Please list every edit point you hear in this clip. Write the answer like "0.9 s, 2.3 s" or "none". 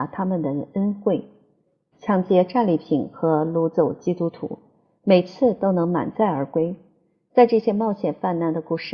1.9 s